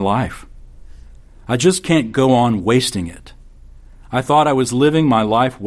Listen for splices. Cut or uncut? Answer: uncut